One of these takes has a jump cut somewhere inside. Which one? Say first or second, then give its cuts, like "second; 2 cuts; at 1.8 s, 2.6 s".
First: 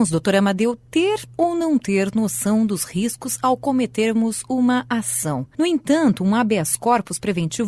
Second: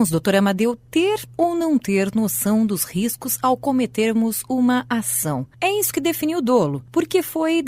first; 1 cut; at 5.5 s